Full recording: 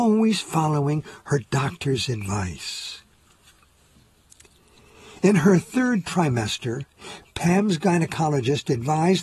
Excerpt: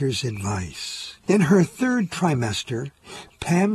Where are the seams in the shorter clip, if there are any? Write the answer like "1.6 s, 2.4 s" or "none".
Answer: 1.2 s